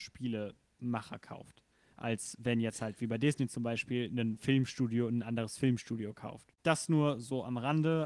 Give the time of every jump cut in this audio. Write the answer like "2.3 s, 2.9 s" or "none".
none